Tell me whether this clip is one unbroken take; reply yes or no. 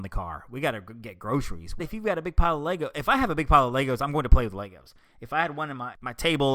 no